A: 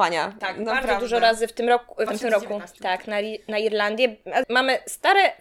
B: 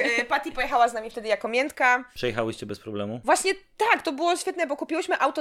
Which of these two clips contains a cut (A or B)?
A